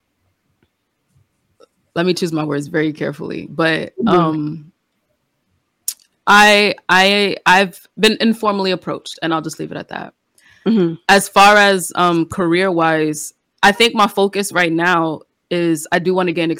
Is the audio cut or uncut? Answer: uncut